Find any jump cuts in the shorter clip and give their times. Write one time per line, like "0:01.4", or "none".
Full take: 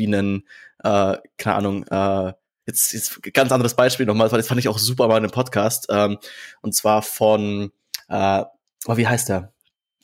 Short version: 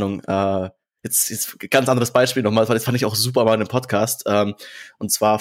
none